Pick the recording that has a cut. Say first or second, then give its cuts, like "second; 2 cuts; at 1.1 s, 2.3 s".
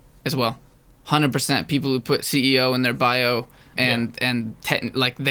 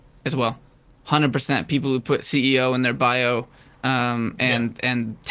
first; 1 cut; at 3.7 s